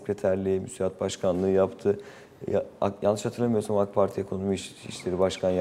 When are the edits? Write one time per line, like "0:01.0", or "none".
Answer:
none